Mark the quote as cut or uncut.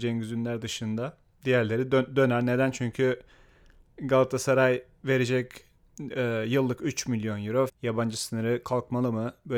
cut